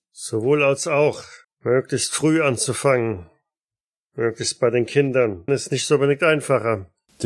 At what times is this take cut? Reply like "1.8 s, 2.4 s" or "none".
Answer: 1.4 s, 5.5 s